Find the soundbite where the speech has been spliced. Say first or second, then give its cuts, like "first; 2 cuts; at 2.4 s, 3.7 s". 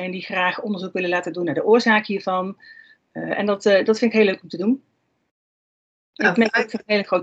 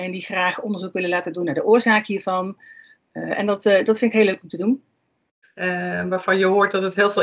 second; 1 cut; at 5.4 s